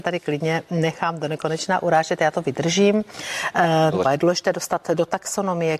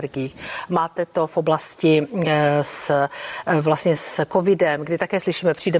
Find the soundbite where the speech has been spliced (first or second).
first